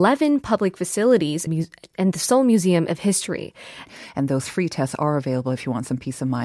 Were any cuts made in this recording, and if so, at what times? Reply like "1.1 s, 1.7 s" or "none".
1.5 s, 3.9 s